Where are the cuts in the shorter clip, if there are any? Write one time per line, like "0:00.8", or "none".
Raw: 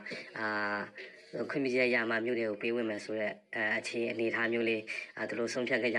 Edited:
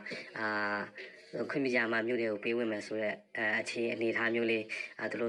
0:01.7

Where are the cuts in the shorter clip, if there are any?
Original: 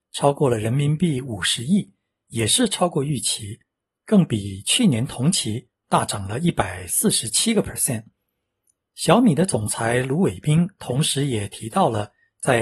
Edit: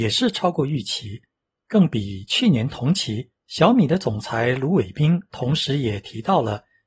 0:03.4

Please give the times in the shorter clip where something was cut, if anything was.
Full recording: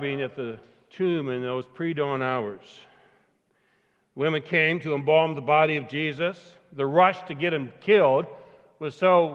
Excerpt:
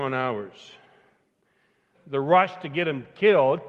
0:01.9

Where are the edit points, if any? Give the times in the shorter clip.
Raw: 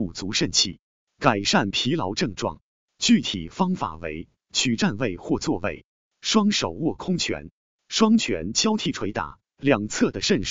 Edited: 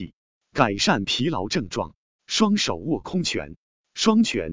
0:02.2

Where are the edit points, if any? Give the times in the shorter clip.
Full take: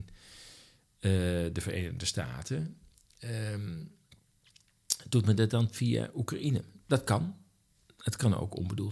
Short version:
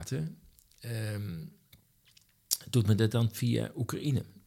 none

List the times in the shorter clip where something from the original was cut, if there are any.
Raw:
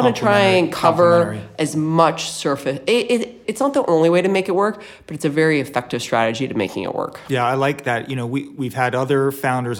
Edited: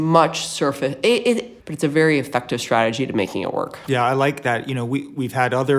0:01.6

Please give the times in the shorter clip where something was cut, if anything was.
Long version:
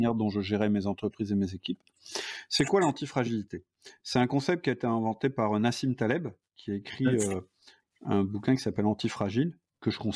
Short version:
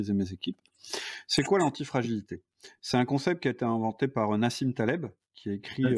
none

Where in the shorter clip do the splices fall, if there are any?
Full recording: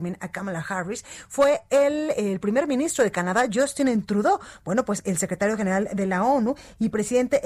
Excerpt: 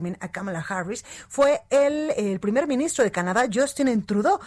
none

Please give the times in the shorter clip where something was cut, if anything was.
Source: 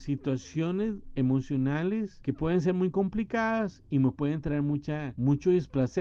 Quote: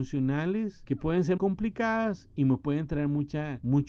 0:01.4

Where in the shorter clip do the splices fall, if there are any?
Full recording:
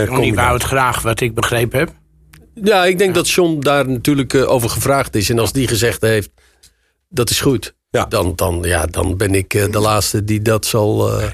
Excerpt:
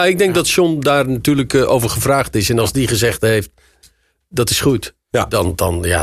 none

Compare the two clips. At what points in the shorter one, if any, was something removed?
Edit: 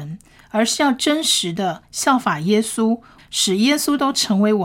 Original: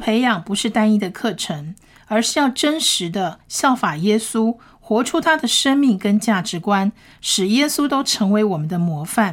0:03.2

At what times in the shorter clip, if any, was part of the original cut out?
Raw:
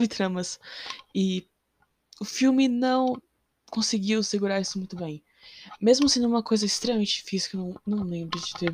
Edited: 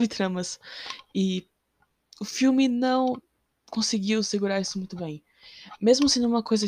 none

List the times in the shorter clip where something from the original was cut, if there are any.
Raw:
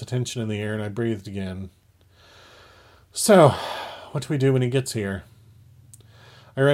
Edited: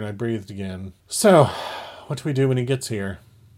0:01.0

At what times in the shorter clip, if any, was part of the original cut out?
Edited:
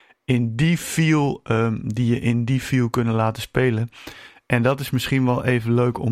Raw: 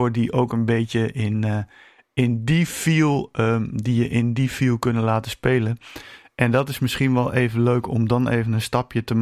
none

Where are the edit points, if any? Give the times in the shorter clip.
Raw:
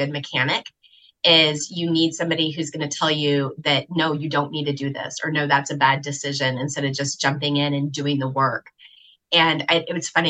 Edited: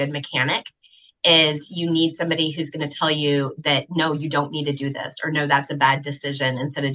none

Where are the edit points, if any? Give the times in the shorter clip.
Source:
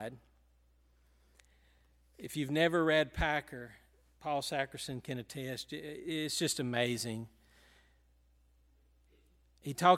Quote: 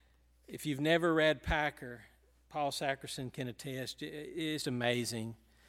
0:04.6

